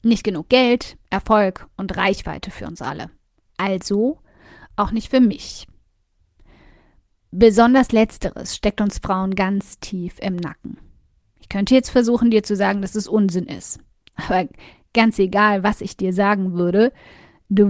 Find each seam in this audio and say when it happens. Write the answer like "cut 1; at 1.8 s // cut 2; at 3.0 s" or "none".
none

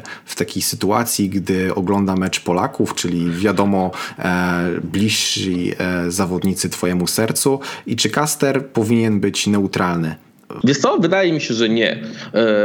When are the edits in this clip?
cut 1; at 10.6 s

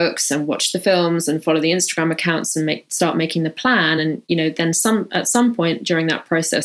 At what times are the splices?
none

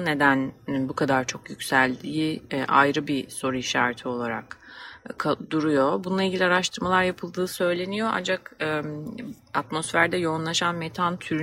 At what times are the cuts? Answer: none

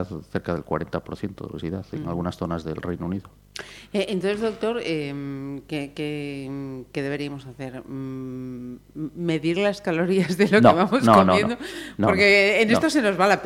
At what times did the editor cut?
none

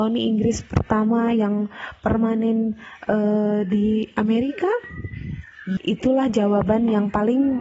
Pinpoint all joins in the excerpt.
cut 1; at 5.8 s

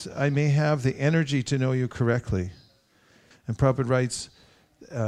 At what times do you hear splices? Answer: cut 1; at 3.3 s

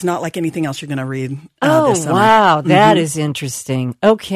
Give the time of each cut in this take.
none

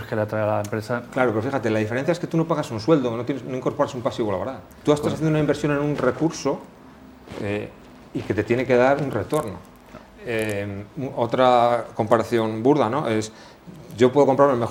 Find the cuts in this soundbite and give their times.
cut 1; at 4.8 s

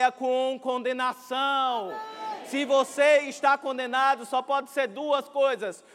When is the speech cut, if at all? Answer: none

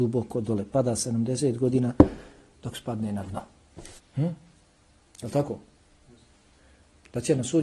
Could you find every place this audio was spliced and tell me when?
cut 1; at 4.0 s

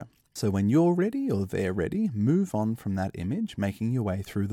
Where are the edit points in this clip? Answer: none

